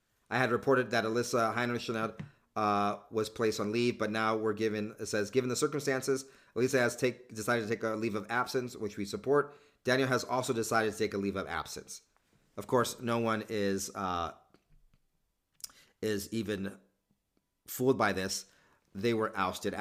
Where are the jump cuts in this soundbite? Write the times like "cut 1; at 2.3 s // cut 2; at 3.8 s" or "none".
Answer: none